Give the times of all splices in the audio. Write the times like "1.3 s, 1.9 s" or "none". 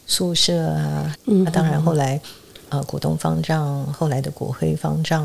1.1 s